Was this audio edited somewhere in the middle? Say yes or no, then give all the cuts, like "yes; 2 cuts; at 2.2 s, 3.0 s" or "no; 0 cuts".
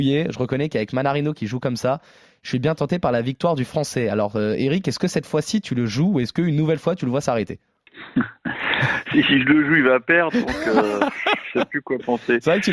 no; 0 cuts